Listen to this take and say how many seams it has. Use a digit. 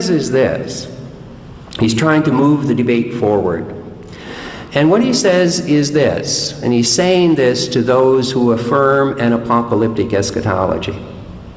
0